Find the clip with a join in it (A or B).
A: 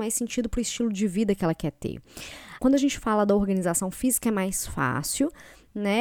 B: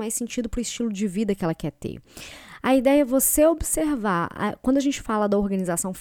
A